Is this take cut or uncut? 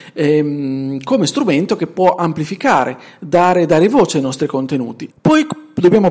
cut